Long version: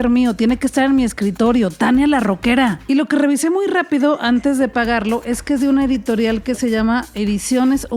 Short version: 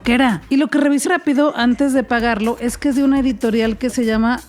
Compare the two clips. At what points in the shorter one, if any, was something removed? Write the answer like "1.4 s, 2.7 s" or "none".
1.0 s